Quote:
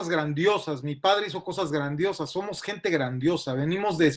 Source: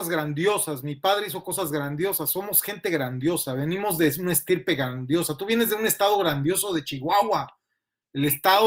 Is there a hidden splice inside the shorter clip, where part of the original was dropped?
no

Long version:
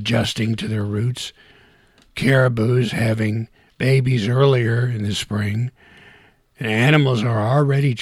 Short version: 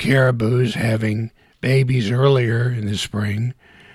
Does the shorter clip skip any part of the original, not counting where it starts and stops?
no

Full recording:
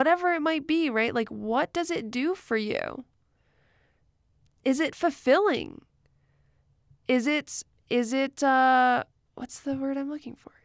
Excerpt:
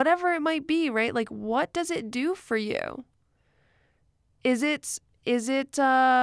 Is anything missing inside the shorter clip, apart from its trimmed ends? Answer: yes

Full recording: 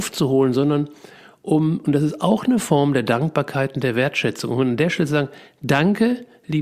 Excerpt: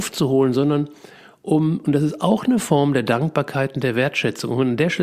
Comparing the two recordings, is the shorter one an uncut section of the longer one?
yes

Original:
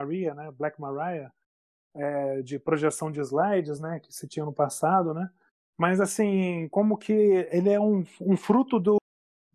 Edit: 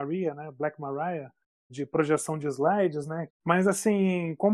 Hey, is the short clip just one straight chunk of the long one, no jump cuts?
no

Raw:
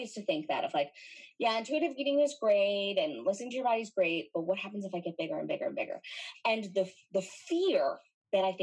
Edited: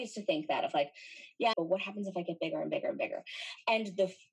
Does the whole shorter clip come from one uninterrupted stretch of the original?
no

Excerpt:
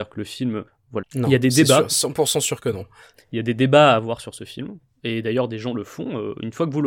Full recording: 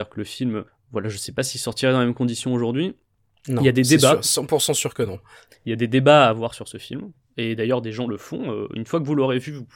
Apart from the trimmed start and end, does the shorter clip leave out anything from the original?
yes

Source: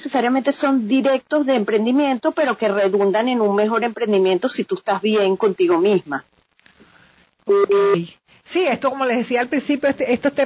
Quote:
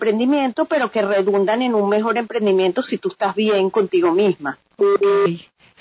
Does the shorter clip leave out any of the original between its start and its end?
yes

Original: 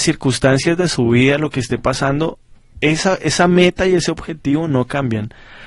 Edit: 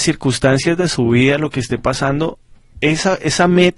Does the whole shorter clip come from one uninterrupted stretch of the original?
yes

